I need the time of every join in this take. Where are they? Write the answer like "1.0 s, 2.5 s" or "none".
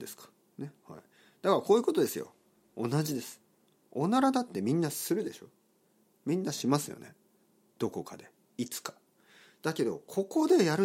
none